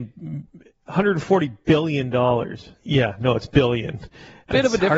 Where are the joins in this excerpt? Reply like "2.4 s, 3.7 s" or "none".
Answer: 2.7 s